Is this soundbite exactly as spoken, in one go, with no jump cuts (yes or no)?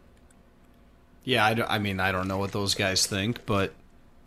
yes